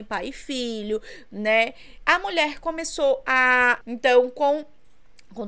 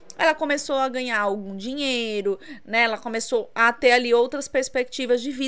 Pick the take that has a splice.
first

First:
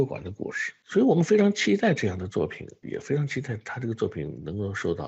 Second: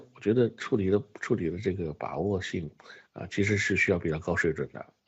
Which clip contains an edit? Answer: first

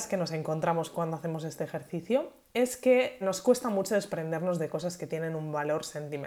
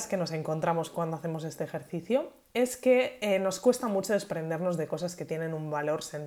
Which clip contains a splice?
first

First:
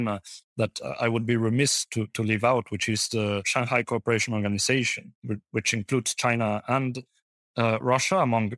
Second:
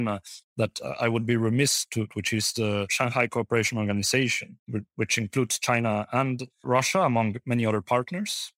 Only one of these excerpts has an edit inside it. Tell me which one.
second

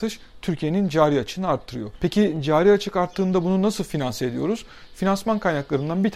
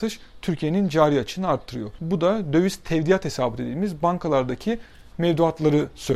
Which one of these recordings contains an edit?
second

